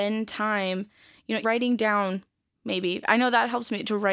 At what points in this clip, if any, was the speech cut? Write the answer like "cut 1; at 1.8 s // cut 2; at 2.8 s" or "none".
cut 1; at 1.4 s